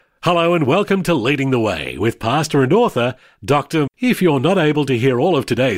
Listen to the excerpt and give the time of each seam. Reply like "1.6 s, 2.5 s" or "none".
3.9 s